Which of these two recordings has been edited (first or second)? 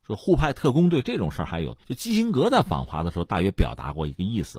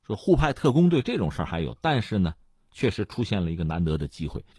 first